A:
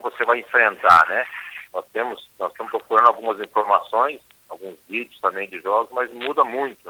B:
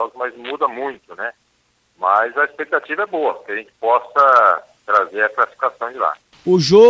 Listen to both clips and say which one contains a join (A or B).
A